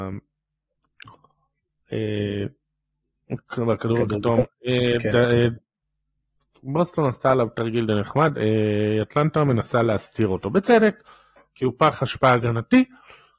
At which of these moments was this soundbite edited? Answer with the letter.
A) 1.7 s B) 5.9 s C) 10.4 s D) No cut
D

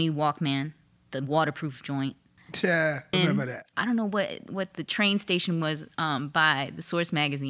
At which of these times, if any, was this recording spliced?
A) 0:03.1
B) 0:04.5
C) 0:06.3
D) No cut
A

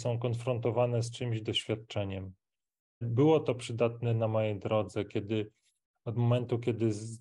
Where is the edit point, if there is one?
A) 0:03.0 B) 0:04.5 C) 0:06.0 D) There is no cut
A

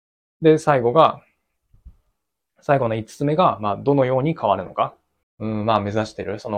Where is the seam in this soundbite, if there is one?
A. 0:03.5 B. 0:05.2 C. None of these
B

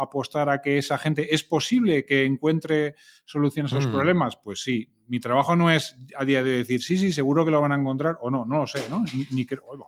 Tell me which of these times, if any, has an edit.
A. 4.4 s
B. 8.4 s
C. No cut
C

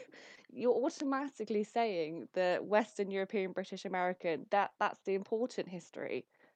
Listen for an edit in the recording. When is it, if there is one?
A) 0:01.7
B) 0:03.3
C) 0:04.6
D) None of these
D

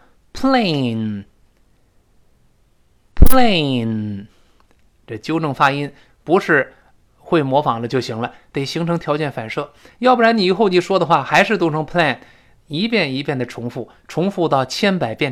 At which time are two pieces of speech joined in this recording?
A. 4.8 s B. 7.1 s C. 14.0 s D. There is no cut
D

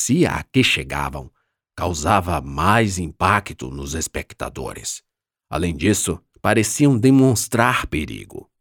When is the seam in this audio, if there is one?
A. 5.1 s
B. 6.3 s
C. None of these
B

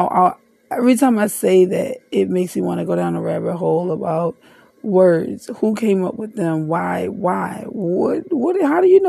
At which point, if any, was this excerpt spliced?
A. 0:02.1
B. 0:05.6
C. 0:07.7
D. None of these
C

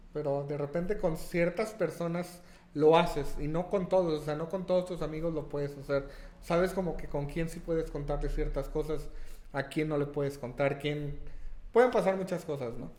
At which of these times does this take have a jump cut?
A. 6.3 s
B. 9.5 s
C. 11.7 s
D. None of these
C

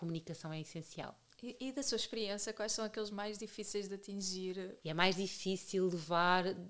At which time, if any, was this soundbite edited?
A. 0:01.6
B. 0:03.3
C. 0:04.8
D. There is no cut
C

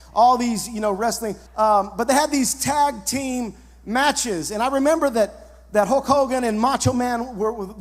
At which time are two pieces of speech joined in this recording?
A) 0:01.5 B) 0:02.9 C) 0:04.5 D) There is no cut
A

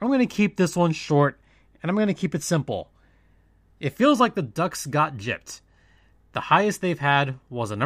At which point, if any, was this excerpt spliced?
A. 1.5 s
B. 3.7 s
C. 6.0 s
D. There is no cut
D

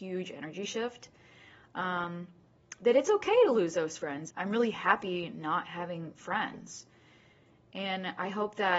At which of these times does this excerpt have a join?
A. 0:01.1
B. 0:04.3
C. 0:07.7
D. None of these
B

